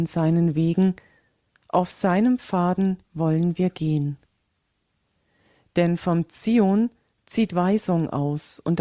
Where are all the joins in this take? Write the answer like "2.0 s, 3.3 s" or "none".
none

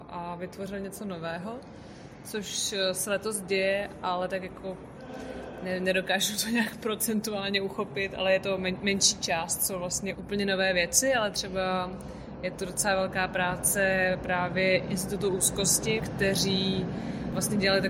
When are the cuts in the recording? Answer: 10.1 s, 16.0 s

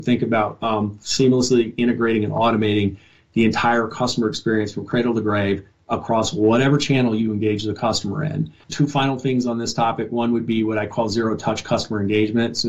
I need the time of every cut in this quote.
8.6 s

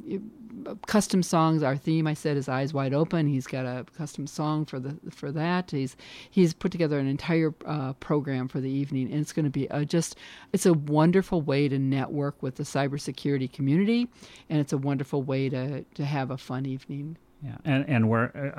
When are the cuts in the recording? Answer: none

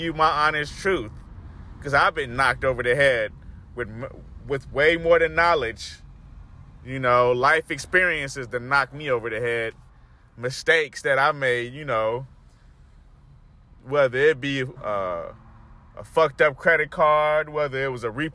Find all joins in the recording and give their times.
14.7 s

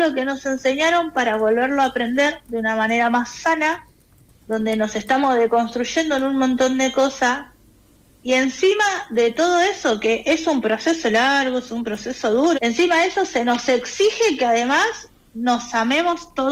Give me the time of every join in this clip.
12.5 s

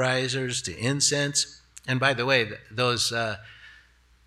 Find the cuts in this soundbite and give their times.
none

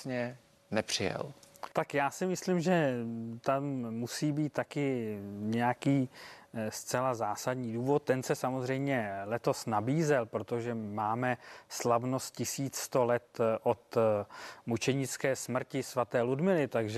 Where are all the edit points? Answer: 1.7 s

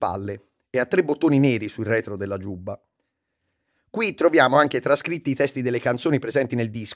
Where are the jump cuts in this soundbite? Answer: none

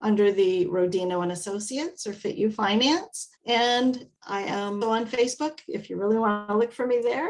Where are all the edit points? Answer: 3.4 s, 4.8 s

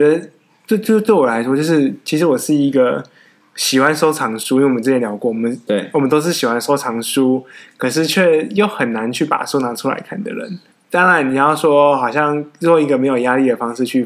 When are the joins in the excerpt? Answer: 10.7 s

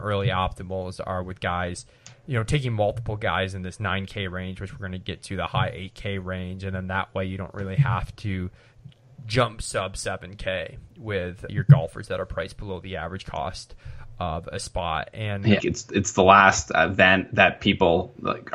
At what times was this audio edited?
11.5 s, 15.6 s

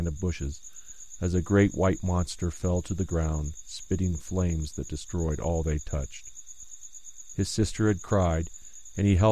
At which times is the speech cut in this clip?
none

